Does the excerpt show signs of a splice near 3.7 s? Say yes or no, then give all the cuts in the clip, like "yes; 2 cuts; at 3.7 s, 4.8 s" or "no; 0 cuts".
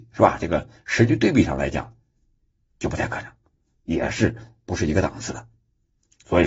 yes; 1 cut; at 3.7 s